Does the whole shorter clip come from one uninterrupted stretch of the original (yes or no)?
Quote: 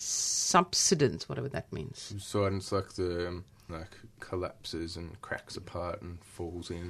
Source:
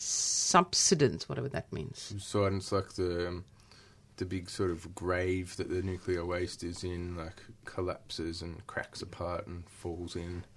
no